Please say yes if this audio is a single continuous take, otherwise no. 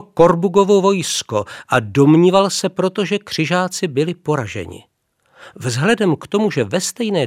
yes